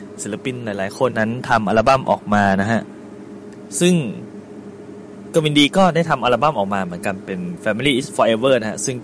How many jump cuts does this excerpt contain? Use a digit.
1